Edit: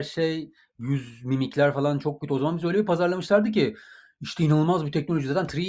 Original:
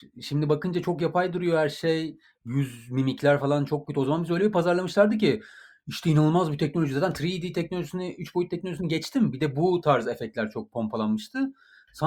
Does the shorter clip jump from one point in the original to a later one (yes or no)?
no